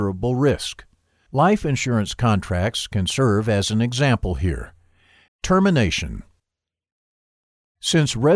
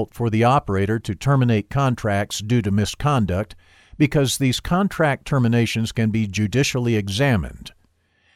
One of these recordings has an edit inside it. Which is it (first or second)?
first